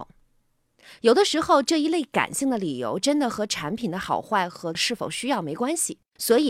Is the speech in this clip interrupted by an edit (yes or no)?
yes